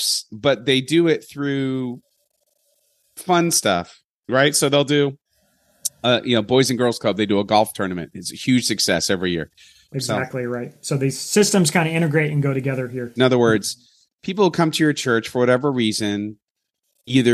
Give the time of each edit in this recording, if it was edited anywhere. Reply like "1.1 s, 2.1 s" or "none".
9.9 s, 13.2 s